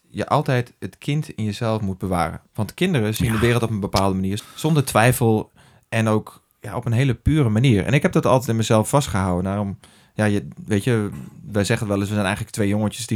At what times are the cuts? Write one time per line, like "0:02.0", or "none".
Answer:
0:04.4

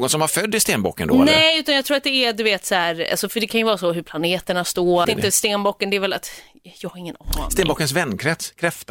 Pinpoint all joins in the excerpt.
0:05.0

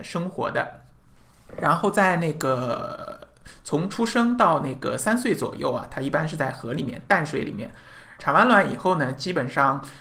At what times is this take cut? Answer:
0:08.2

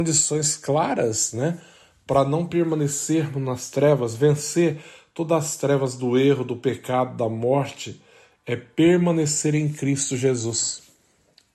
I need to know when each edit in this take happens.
none

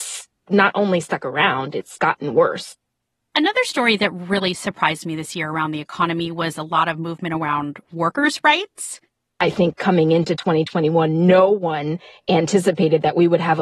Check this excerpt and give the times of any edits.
none

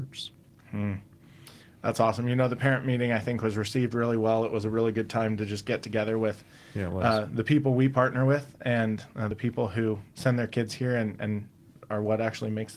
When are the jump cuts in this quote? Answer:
none

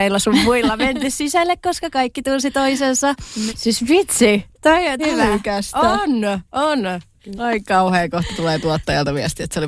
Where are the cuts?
0:03.5
0:05.0
0:07.3

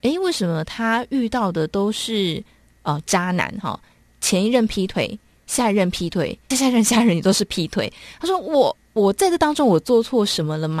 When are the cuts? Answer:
0:06.5

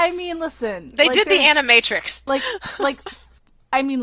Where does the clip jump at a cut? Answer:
0:02.3

